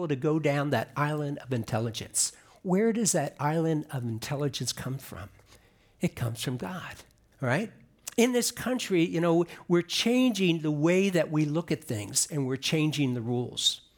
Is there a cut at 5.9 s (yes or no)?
no